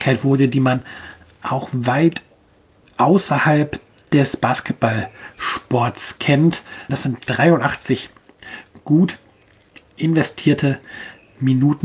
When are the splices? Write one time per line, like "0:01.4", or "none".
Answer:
0:06.9